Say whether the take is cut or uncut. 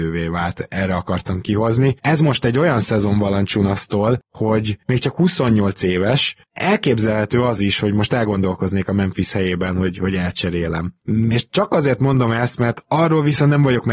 uncut